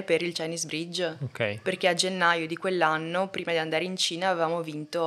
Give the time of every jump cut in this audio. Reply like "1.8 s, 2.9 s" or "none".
none

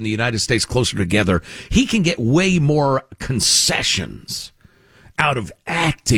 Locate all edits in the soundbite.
none

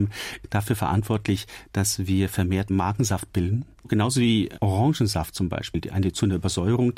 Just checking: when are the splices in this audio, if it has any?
none

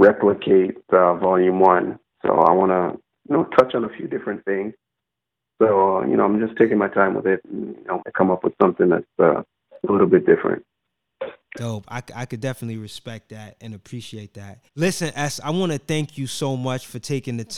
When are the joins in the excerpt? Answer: 8.0 s, 14.7 s

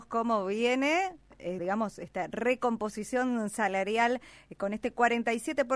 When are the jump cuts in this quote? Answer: 1.6 s

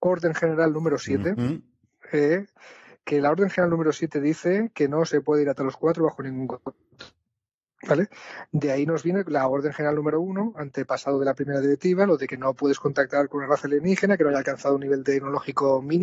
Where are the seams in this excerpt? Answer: none

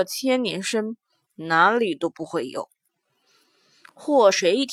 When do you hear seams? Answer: 1.3 s

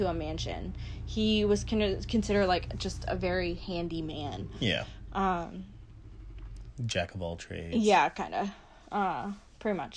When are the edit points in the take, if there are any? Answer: none

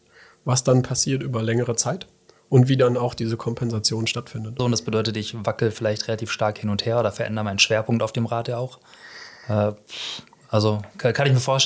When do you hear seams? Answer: 4.6 s

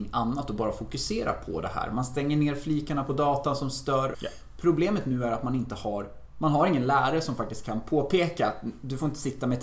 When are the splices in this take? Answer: 4.1 s

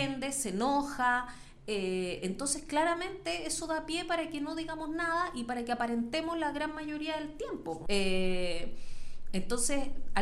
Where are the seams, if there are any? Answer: 7.9 s

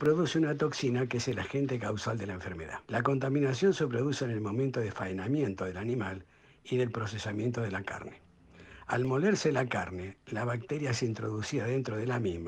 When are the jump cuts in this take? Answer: 2.8 s

